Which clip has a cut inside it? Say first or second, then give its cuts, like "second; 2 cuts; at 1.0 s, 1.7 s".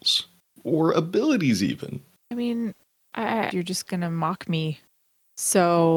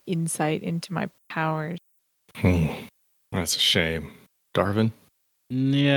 first; 2 cuts; at 2.2 s, 3.5 s